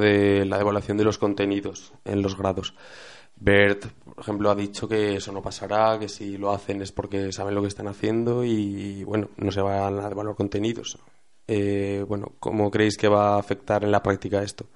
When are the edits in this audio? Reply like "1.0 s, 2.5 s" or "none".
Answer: none